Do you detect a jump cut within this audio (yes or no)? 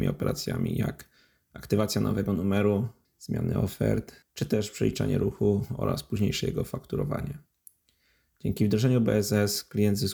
yes